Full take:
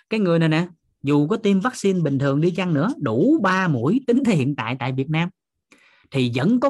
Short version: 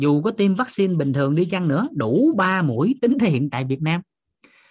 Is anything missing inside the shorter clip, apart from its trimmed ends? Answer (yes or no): yes